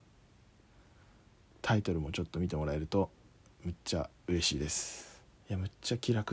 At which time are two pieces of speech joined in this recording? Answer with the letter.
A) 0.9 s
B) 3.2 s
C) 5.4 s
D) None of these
C